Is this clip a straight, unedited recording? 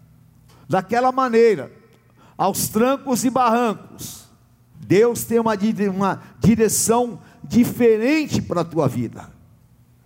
no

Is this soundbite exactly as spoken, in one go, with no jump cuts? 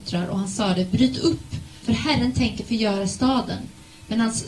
no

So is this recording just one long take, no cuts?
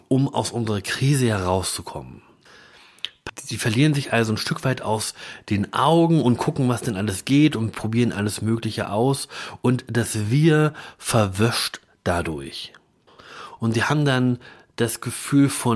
no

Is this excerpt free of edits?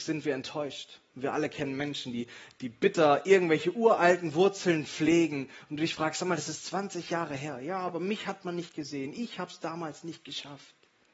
yes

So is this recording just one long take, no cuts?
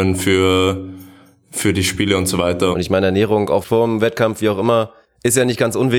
no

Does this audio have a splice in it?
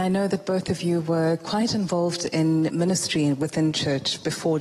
no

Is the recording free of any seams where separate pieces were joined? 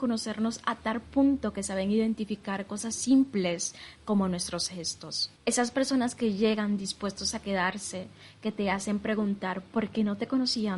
no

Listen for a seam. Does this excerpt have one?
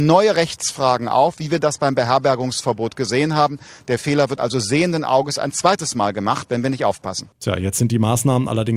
no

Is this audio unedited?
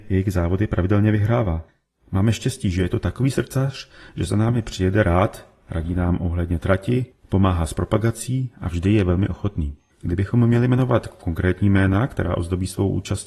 no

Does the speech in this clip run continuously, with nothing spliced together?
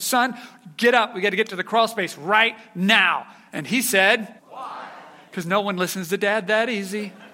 no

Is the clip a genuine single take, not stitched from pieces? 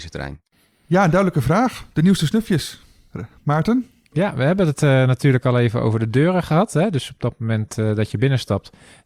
yes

